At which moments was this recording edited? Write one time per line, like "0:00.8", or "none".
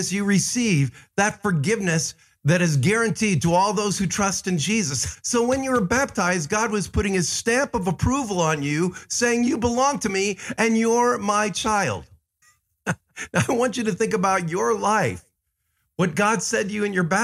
0:05.1
0:12.4